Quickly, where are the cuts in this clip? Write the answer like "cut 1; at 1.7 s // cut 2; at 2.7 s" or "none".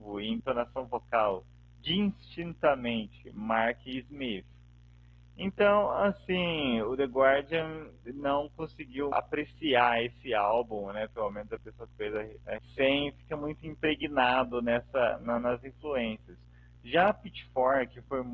cut 1; at 9.1 s // cut 2; at 12.6 s